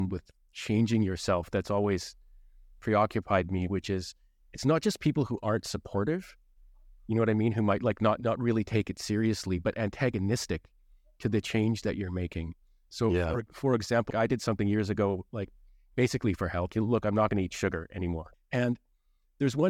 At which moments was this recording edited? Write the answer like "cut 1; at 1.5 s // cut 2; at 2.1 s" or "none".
cut 1; at 14.1 s // cut 2; at 16.7 s // cut 3; at 18.3 s